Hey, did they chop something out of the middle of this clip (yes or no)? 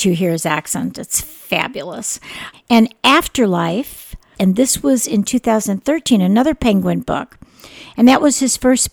yes